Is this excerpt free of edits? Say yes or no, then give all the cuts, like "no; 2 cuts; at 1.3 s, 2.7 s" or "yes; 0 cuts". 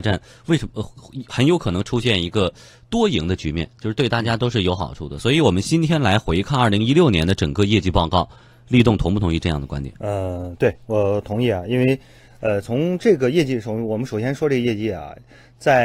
yes; 0 cuts